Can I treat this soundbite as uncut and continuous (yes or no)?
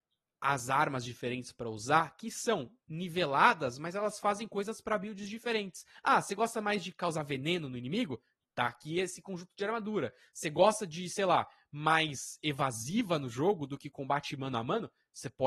yes